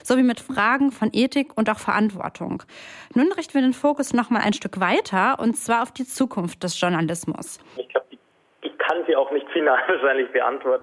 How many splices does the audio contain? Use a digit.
1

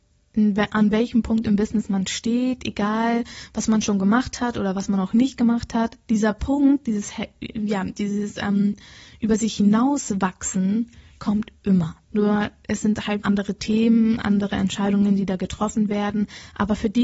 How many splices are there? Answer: 2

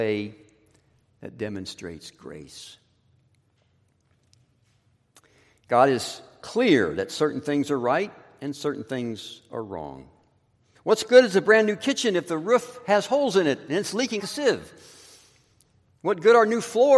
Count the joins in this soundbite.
2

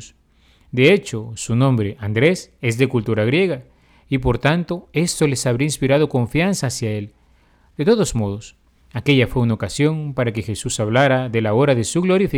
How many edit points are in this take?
0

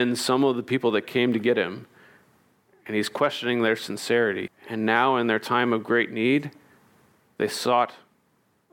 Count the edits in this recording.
1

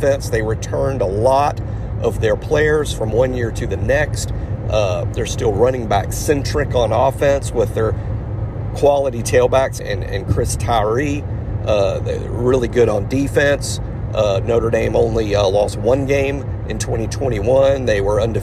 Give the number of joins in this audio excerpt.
1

